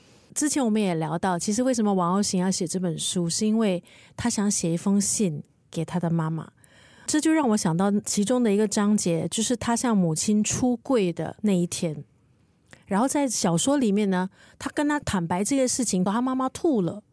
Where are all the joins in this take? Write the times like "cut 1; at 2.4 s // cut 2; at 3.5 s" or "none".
cut 1; at 16.1 s